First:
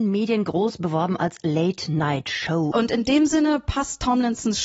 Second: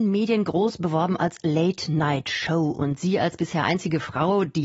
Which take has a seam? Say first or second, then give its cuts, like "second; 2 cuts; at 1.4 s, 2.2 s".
first; 1 cut; at 2.7 s